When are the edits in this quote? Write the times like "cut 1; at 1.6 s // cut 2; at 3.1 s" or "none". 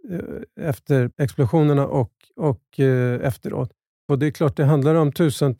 cut 1; at 1.1 s // cut 2; at 4.1 s